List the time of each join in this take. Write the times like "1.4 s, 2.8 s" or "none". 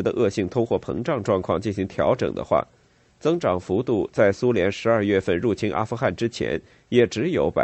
none